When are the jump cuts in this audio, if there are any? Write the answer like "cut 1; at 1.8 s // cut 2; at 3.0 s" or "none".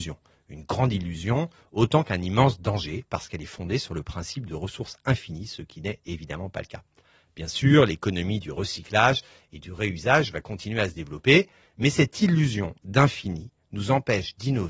cut 1; at 11.6 s